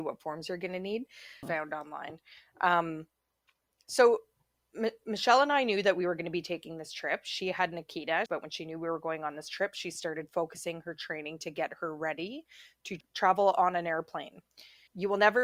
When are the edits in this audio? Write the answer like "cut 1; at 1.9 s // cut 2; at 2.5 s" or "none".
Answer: cut 1; at 1.4 s // cut 2; at 8.3 s